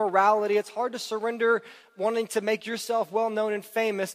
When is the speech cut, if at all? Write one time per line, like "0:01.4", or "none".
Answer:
none